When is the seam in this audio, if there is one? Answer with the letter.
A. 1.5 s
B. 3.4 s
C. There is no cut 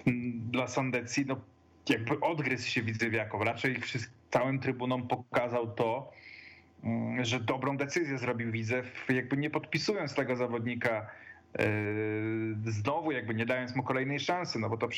C